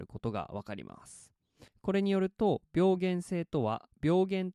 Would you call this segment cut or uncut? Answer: cut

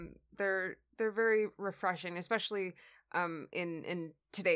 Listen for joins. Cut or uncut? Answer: uncut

